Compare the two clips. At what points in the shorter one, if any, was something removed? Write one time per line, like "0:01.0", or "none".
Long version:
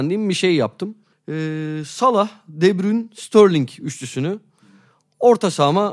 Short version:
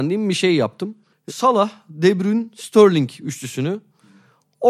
0:01.3